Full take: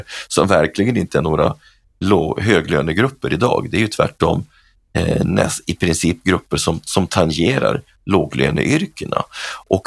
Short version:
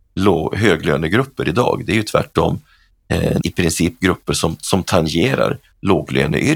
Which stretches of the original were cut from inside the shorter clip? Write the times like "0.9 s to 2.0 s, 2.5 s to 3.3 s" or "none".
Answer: 5.3 s to 5.6 s